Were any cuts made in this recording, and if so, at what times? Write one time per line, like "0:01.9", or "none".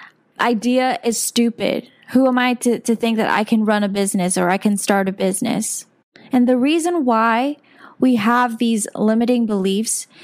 none